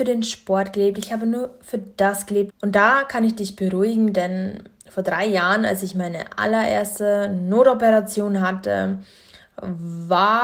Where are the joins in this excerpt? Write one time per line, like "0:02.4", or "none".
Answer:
0:02.5